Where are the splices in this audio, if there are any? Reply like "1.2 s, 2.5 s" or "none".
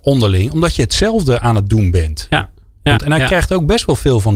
3.0 s

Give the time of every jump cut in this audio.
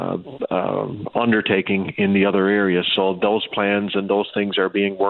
none

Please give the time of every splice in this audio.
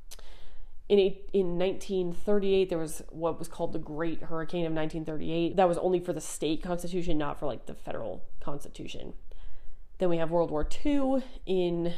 5.5 s, 10.0 s

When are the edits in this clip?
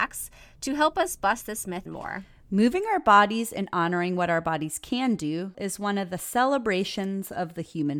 1.9 s, 5.5 s

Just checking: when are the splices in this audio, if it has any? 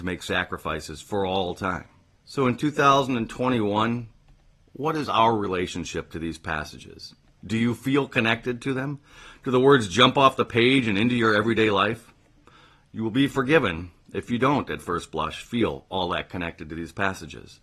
none

